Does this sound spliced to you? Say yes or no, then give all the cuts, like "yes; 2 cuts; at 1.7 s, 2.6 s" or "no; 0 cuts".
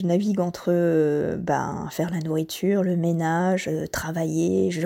no; 0 cuts